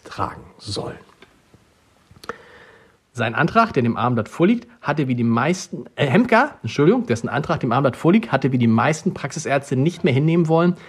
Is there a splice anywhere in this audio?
yes; 1 cut; at 3.0 s

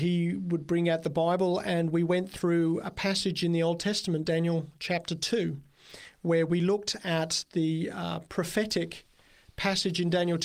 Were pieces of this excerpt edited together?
no; 0 cuts

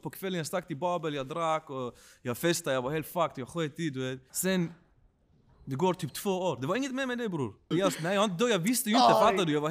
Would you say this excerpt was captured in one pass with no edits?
no; 2 cuts; at 4.3 s, 7.7 s

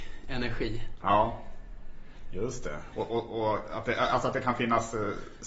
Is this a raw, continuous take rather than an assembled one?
no; 1 cut; at 2.9 s

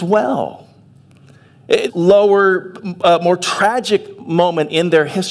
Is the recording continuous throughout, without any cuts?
no; 1 cut; at 1.9 s

